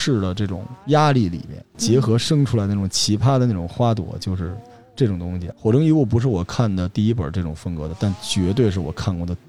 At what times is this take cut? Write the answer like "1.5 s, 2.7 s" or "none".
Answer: 5.5 s